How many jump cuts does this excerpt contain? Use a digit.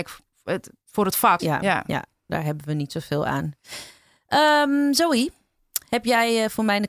1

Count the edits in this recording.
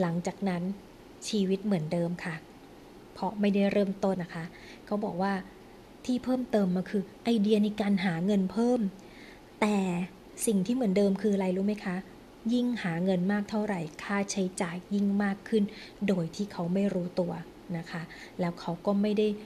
1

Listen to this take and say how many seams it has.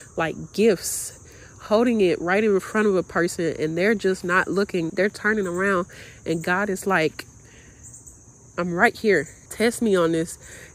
2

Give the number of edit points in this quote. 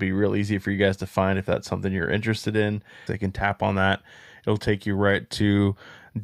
1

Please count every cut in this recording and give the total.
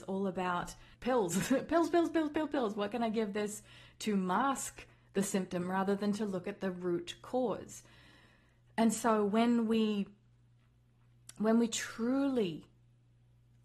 1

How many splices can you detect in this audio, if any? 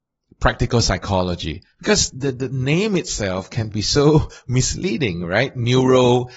0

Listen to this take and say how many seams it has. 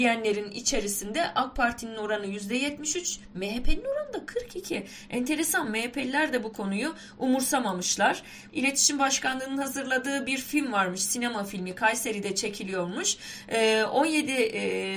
1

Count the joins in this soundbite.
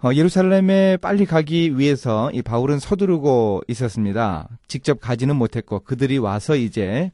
1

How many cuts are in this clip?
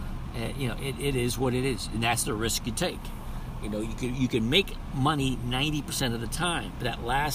0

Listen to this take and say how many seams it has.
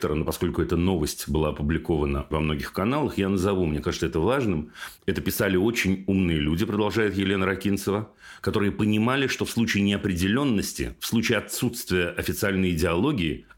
2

